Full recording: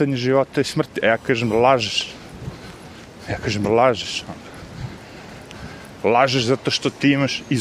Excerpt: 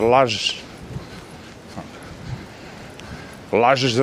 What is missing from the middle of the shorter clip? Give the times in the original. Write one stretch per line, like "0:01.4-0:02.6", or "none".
0:03.3-0:04.3